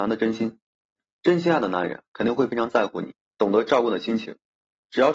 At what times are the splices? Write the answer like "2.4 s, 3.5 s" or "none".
none